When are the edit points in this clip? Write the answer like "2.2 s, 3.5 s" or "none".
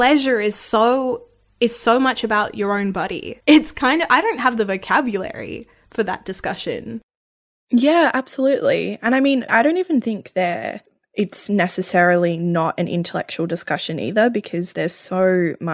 3.4 s, 9.5 s